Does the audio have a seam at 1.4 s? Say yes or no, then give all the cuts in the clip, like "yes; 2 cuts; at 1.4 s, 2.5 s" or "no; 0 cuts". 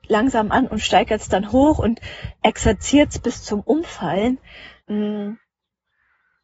no; 1 cut; at 4.8 s